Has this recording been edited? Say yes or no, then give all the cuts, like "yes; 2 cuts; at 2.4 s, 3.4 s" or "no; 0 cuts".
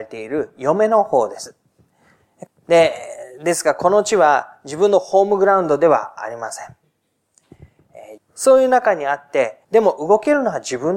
yes; 3 cuts; at 2.5 s, 8.2 s, 9.6 s